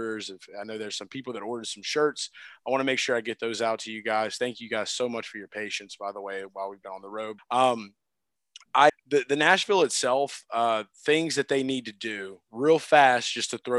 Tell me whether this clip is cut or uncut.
cut